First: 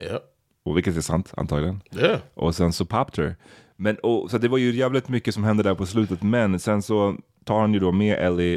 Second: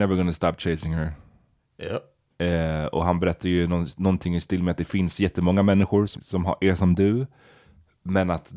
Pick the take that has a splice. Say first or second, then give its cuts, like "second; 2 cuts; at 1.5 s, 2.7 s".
second; 2 cuts; at 2.3 s, 6.2 s